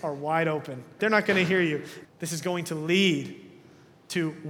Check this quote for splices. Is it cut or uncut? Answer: cut